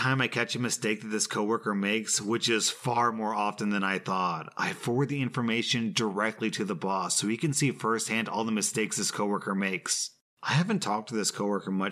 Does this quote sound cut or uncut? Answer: uncut